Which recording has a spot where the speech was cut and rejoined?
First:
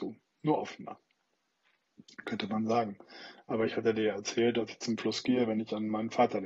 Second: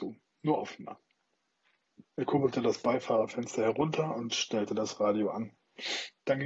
second; 1 cut; at 2.0 s

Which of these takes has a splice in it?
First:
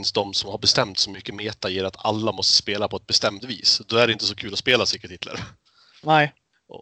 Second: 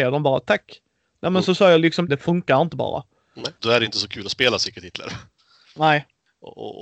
second; 2 cuts; at 2.1 s, 3.6 s

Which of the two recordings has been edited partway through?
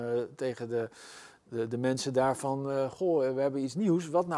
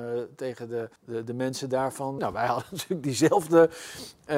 second; 2 cuts; at 1.0 s, 2.2 s

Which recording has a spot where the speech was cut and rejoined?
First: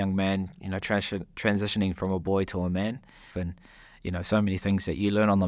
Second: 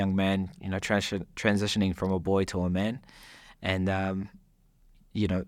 first; 1 cut; at 3.3 s

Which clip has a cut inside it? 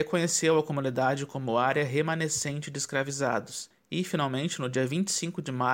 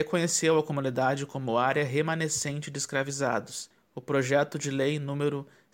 second; 1 cut; at 3.7 s

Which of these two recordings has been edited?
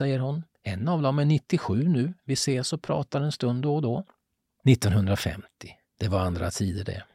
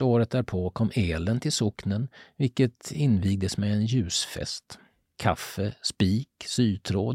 second; 1 cut; at 5.1 s

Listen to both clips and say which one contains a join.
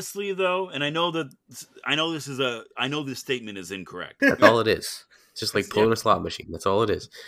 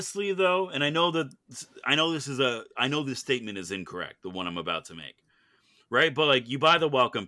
first; 1 cut; at 4.2 s

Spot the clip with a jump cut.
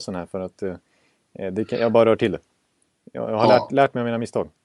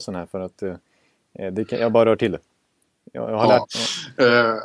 second; 1 cut; at 3.6 s

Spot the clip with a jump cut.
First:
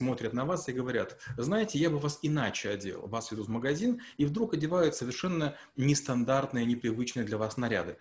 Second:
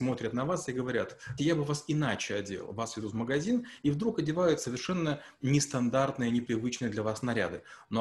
second; 1 cut; at 1.4 s

